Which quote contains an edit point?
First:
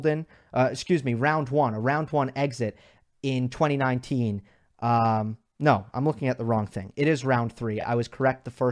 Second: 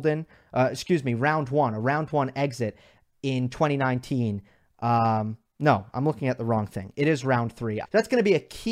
second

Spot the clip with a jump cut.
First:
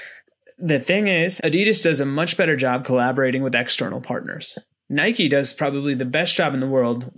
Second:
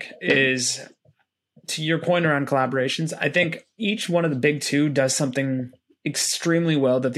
first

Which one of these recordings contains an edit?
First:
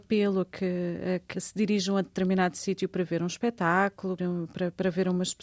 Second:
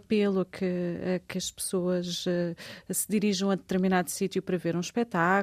first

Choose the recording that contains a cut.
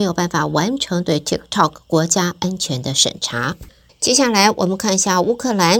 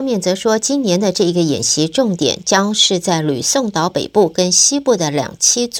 first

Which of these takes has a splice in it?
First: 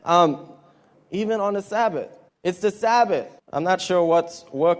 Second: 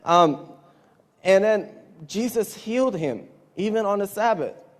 first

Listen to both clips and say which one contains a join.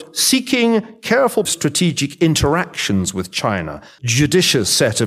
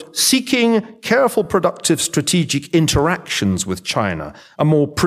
first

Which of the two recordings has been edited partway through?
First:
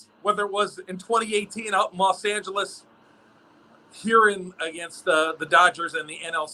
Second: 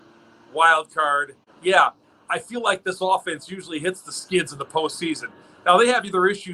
second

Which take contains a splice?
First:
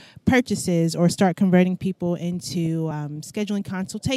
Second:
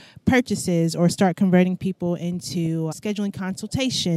second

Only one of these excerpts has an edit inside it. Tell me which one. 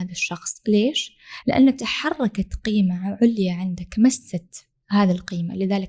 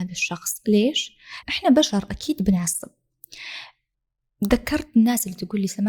second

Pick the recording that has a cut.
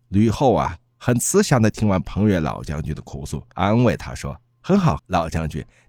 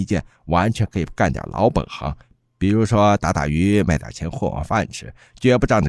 first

